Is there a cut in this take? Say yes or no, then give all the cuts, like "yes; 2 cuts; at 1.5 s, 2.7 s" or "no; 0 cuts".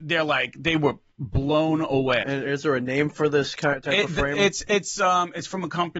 yes; 1 cut; at 2.2 s